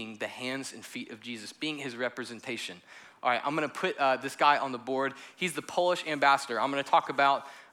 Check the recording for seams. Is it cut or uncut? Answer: uncut